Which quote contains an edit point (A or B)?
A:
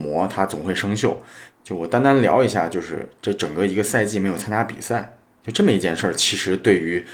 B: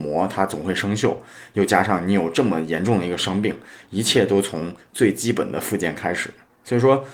A